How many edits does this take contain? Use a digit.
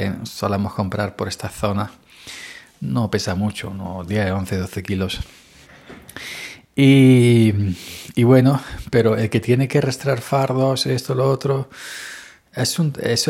0